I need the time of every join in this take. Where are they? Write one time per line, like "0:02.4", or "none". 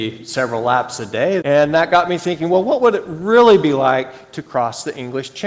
0:01.4